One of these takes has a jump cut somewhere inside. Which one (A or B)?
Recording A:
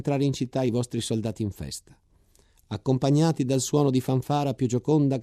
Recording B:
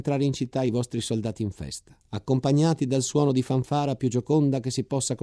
B